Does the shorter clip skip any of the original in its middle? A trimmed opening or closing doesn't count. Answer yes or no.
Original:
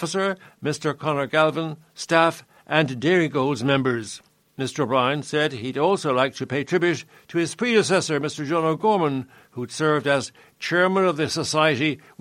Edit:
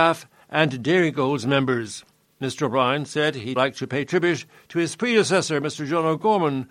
yes